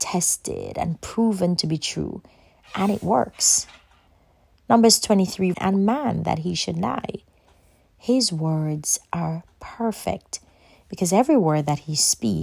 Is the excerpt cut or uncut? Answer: cut